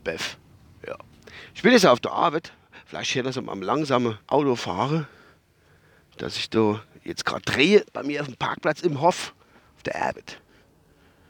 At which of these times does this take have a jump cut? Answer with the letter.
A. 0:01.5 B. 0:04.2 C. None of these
B